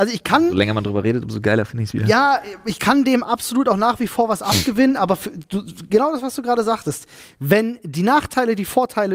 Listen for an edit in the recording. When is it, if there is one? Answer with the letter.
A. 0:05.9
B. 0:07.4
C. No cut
C